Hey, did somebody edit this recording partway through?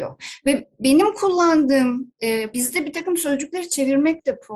yes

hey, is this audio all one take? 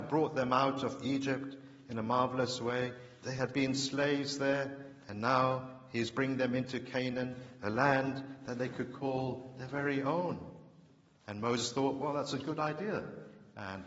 no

